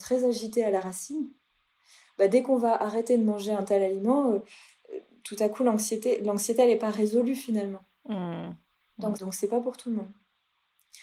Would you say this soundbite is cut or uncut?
cut